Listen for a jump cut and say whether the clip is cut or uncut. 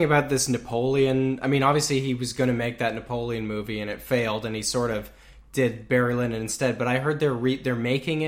uncut